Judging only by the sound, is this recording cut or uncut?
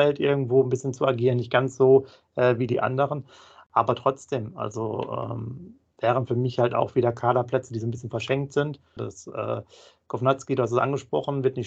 cut